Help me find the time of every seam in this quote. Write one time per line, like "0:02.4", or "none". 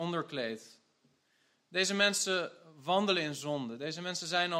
none